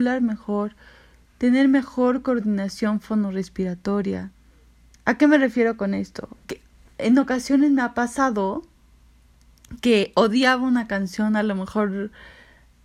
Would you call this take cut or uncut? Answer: cut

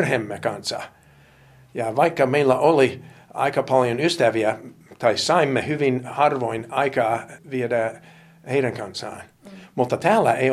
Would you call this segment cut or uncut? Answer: uncut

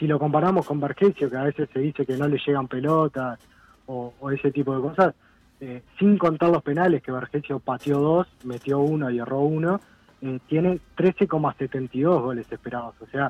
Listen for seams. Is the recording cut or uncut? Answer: uncut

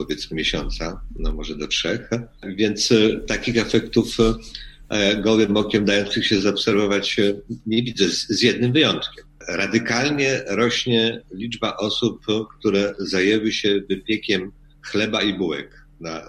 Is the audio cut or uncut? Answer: uncut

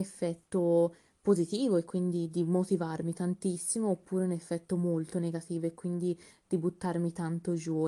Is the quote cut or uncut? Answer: uncut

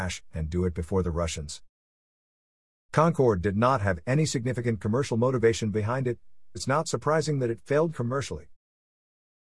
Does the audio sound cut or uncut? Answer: cut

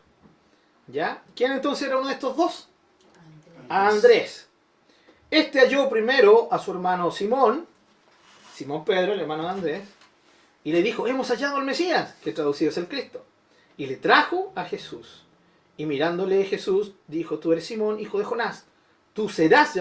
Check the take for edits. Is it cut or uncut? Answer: uncut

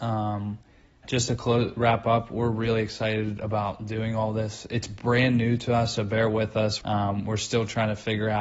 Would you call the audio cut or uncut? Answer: cut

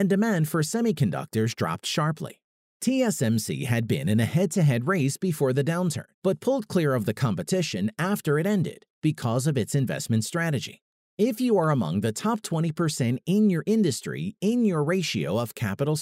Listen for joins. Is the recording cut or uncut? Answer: cut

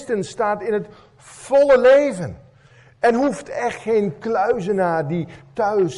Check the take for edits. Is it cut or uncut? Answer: uncut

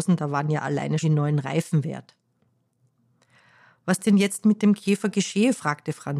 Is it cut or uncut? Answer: cut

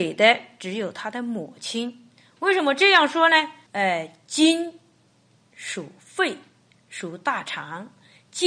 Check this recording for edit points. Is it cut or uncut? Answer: cut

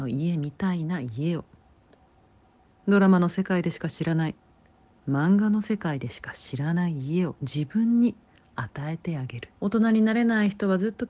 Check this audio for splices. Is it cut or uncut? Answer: cut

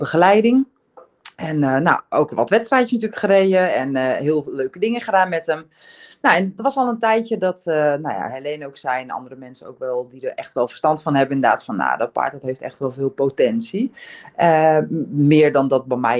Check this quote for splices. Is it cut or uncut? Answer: uncut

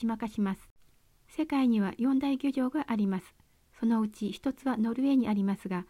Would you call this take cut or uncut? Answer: uncut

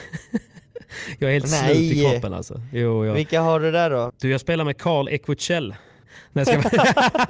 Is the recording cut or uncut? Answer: cut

